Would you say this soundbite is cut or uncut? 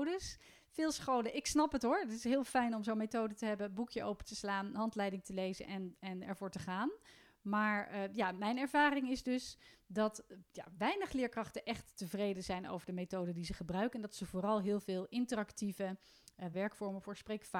cut